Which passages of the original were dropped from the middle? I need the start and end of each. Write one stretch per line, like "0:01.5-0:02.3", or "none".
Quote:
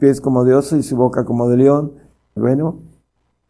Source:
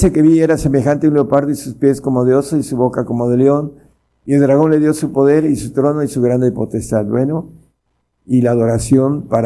0:04.2-0:07.1